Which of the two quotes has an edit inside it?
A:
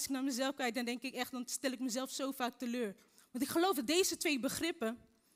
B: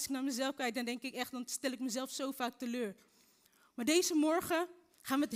A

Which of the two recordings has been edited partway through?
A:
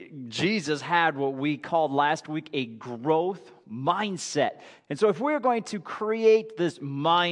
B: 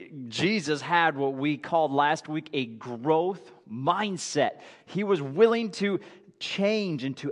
A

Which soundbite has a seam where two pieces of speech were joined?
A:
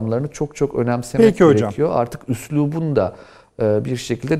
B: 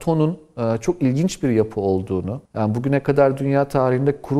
B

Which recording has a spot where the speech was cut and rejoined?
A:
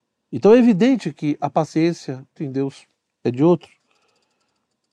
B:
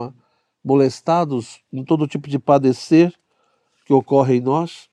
A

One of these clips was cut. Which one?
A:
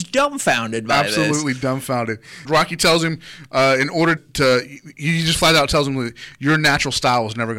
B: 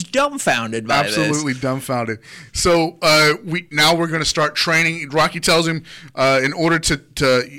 A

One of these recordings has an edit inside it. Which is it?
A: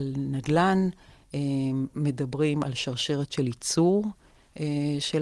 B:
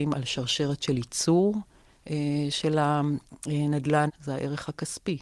B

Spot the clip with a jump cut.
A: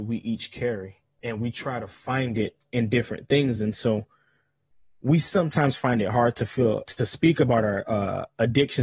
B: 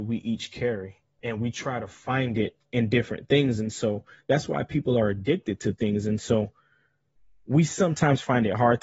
A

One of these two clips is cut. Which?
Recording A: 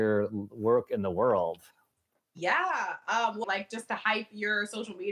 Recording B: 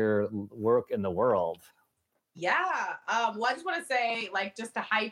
A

